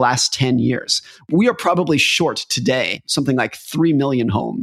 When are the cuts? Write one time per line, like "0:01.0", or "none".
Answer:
none